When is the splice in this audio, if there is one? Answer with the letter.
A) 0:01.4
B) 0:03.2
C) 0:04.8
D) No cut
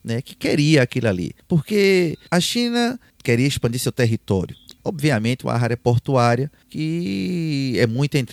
C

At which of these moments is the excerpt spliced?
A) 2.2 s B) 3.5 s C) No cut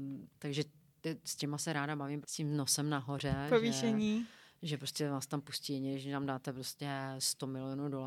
A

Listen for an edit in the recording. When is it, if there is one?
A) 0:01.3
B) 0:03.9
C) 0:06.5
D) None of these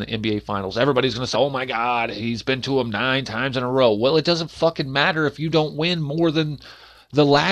A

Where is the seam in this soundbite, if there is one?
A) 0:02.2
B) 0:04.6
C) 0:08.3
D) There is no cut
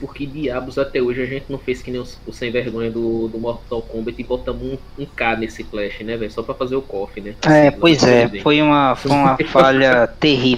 A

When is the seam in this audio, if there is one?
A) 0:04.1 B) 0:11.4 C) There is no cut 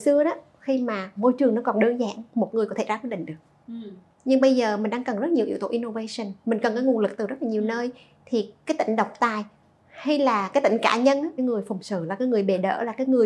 B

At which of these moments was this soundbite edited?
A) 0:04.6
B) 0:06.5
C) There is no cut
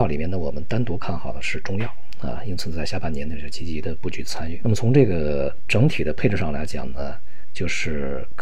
A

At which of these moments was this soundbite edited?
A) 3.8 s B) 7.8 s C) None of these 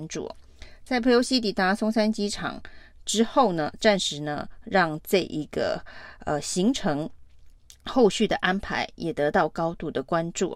A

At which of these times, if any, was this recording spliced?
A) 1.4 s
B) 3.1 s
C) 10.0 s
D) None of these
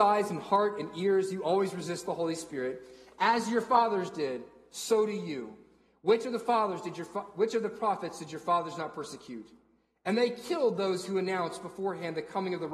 D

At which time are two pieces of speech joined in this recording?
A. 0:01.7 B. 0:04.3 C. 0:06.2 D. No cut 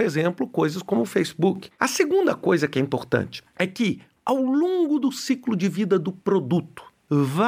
A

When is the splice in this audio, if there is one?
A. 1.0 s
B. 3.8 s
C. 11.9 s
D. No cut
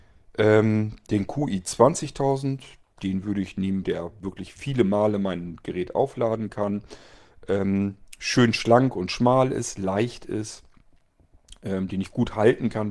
B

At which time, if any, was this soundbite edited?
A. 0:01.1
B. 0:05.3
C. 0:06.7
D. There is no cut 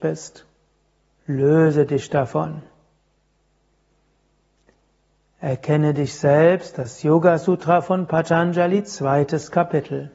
A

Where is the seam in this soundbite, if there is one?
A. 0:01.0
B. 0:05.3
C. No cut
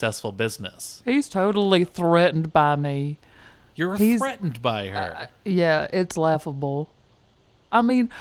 C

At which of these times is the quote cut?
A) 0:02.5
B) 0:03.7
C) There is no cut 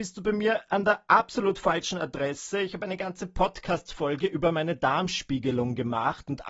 C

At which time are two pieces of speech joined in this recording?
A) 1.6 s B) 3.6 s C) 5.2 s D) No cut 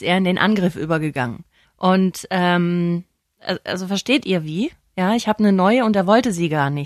A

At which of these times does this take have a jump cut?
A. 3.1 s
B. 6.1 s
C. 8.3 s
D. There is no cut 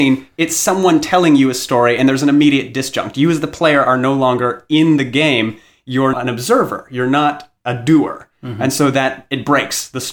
B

